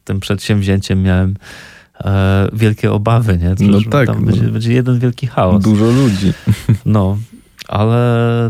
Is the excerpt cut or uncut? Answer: cut